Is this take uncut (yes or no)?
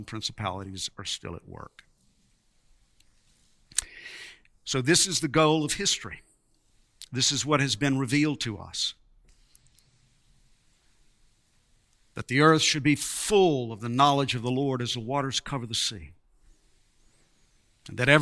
yes